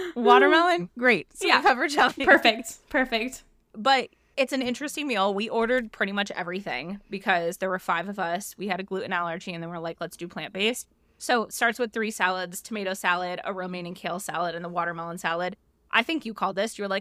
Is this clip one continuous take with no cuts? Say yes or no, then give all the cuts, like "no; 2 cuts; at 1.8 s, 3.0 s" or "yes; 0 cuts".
no; 1 cut; at 4.3 s